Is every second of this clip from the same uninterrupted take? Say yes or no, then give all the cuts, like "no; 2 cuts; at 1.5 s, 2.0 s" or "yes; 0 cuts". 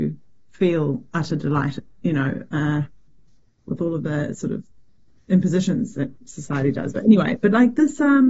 yes; 0 cuts